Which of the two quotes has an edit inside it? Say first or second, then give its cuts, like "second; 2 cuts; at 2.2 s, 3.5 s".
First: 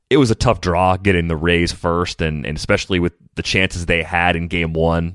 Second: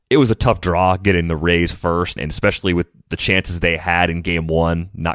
second; 1 cut; at 2.2 s